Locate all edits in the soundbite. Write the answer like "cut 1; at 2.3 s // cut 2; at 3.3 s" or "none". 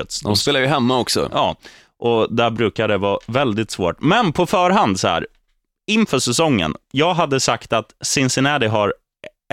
none